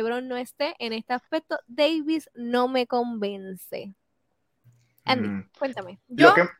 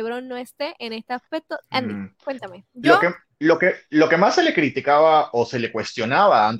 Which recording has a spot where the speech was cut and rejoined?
second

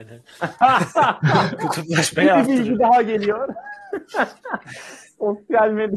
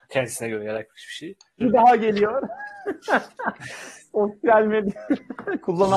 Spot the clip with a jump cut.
second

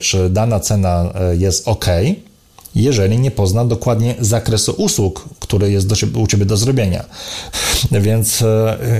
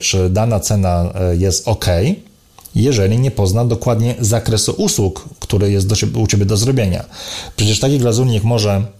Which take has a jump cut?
first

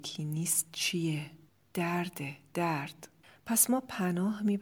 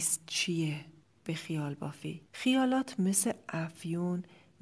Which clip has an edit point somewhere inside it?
second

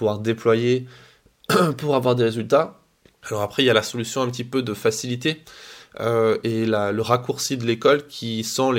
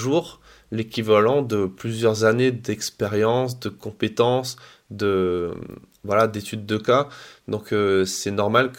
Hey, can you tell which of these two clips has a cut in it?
first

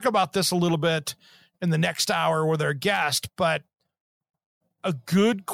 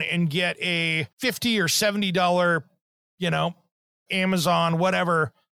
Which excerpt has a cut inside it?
second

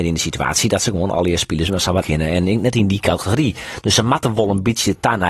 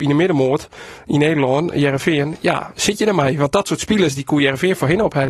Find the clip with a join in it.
first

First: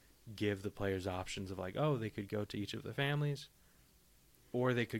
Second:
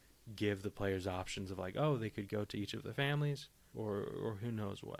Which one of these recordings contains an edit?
second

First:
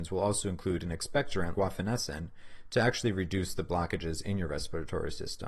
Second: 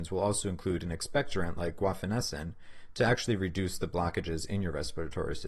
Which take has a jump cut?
first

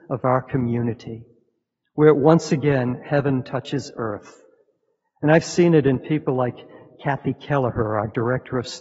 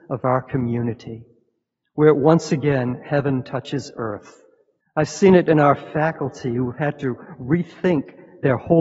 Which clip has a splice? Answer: second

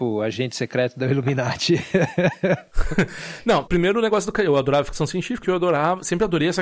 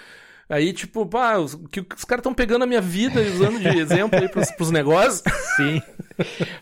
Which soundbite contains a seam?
first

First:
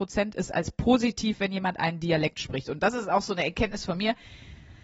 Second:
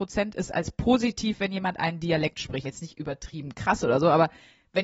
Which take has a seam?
second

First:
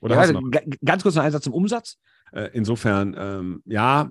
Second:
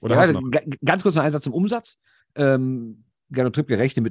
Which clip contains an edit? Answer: first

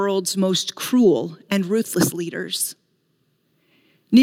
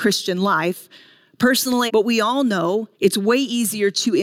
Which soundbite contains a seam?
second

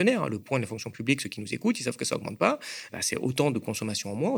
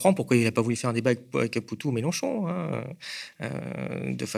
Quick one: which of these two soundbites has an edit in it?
first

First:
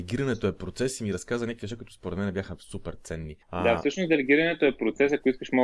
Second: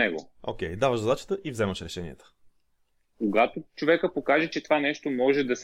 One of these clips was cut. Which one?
first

